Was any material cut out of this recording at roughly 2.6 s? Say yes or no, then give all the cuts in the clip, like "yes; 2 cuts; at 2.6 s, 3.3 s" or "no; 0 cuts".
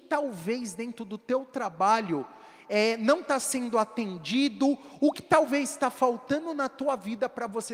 no; 1 cut; at 5.1 s